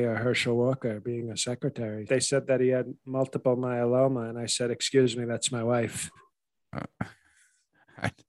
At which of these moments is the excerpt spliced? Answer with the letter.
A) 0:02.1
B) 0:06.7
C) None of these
A